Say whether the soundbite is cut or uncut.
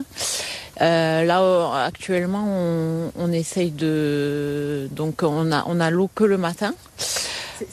uncut